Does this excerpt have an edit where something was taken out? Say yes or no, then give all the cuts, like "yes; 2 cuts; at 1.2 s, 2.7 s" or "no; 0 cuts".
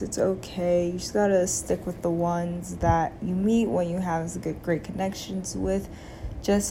no; 0 cuts